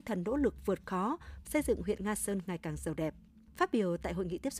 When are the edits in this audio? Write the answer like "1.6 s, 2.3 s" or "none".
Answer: 1.4 s